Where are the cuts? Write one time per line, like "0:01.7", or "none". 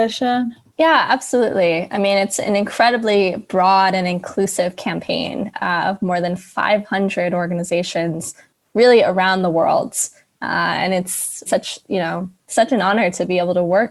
0:11.5